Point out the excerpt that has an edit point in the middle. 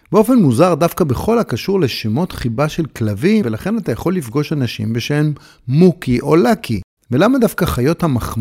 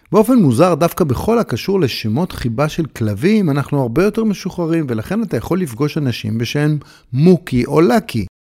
first; 2 cuts; at 3.4 s, 7.0 s

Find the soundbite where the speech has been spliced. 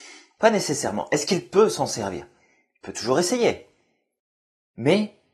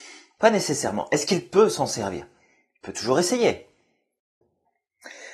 second; 1 cut; at 4.4 s

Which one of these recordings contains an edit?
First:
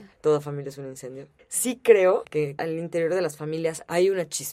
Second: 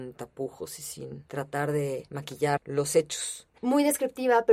second; 1 cut; at 3.5 s

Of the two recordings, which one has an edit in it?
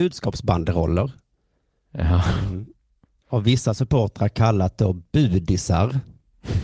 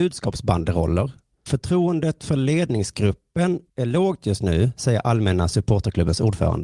second; 2 cuts; at 1.5 s, 3.7 s

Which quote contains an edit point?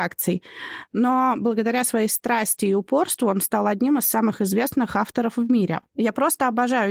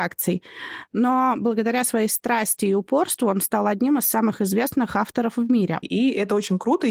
second; 1 cut; at 5.8 s

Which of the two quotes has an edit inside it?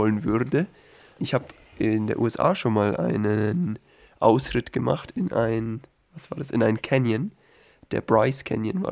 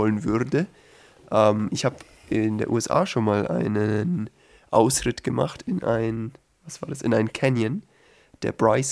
first; 1 cut; at 1.2 s

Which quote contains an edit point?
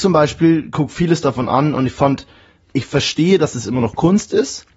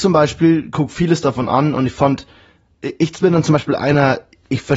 first; 1 cut; at 2.6 s

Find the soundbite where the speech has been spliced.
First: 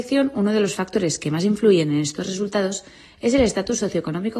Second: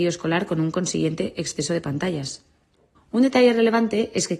second; 1 cut; at 3.0 s

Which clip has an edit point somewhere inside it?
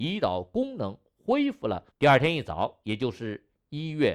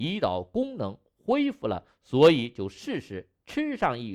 first; 1 cut; at 1.9 s

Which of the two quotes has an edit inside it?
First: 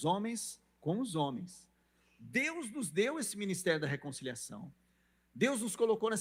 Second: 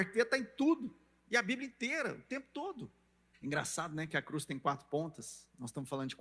second; 1 cut; at 3.3 s

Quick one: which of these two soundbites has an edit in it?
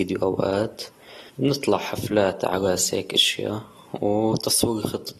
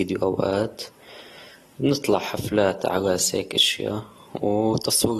first; 1 cut; at 1.3 s

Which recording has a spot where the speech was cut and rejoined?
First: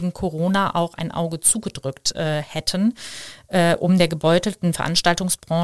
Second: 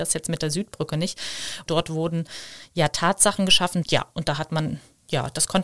second; 2 cuts; at 1.7 s, 3.8 s

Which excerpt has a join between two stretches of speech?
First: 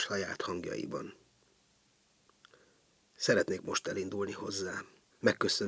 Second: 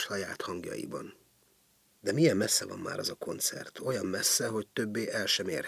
second; 1 cut; at 1.9 s

